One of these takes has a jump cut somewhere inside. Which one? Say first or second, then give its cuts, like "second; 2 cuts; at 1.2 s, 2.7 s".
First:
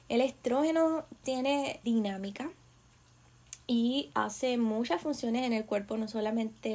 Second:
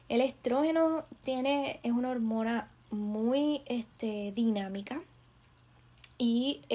first; 2 cuts; at 1.8 s, 4.1 s